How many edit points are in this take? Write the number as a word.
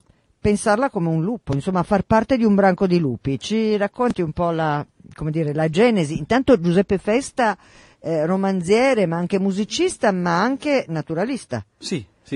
zero